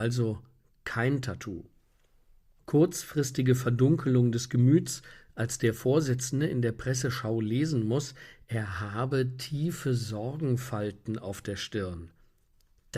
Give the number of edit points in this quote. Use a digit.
0